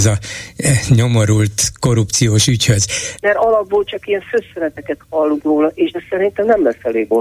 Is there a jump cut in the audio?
yes; 1 cut; at 3.2 s

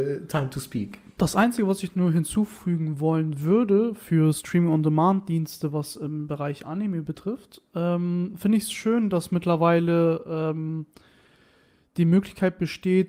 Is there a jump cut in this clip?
no; 0 cuts

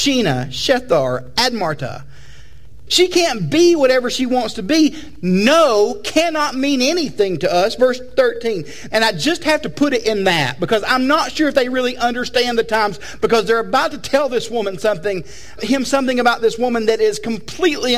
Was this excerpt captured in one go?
no; 3 cuts; at 2.9 s, 8.9 s, 15.6 s

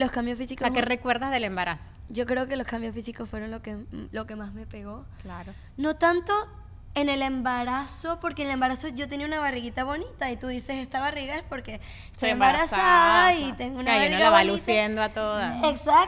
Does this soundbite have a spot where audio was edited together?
no; 0 cuts

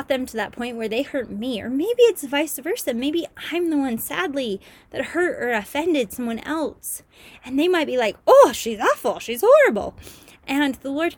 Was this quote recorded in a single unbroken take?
yes; 0 cuts

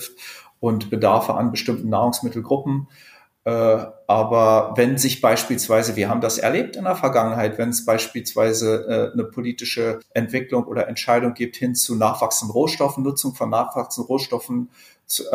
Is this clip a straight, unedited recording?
yes; 0 cuts

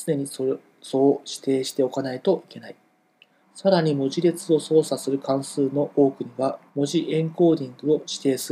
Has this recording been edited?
yes; 2 cuts; at 3.4 s, 6.7 s

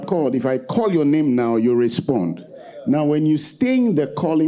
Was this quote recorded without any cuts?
yes; 0 cuts

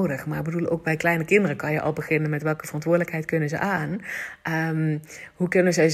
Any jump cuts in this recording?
no; 0 cuts

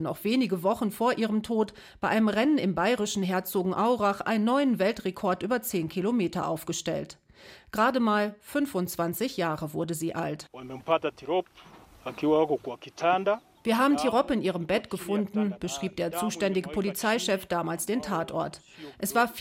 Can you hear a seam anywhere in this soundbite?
no; 0 cuts

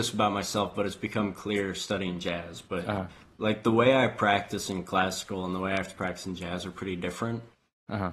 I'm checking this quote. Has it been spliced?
no; 0 cuts

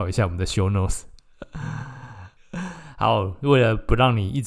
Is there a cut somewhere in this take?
yes; 1 cut; at 2.4 s

